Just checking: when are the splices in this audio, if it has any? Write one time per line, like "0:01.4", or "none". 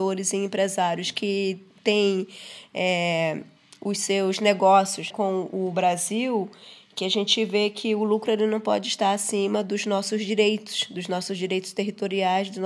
0:05.1